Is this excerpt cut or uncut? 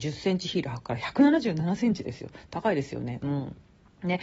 uncut